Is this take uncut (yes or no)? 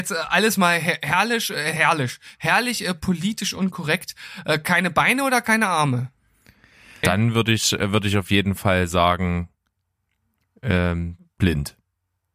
no